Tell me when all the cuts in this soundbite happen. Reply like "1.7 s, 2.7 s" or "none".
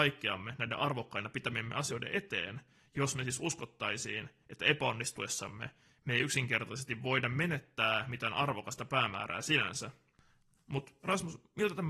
10.6 s

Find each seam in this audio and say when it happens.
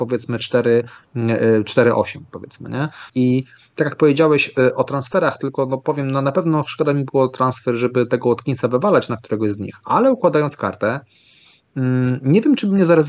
3.1 s

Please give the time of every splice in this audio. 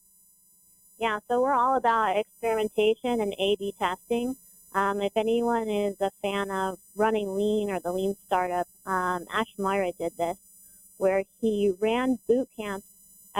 none

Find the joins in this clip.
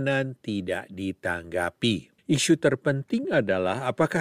2.2 s

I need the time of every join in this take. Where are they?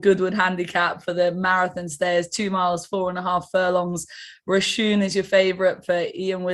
none

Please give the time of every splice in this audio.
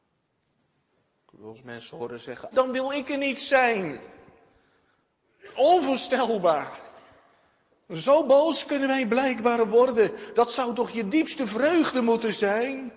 2.5 s

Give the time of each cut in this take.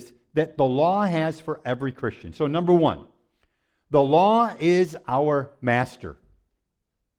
none

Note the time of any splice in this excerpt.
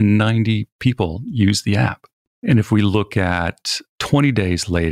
2.2 s, 4.0 s

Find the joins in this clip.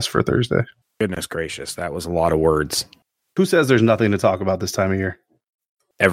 none

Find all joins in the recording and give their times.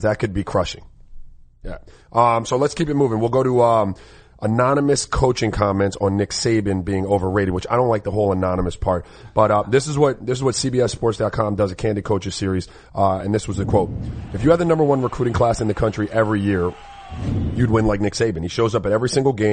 none

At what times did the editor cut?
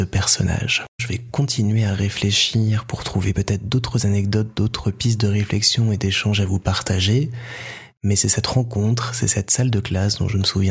1.0 s

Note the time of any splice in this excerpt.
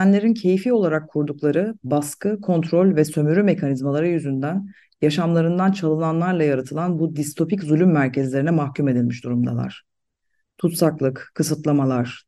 none

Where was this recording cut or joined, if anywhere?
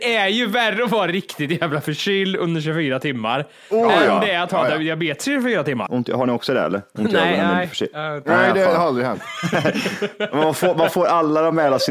5.9 s

